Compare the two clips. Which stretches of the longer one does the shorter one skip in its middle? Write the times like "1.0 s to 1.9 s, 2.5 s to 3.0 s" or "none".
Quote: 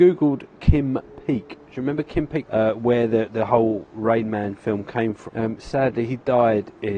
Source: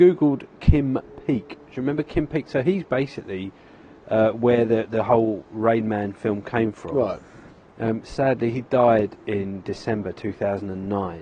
2.4 s to 4.0 s, 6.9 s to 7.7 s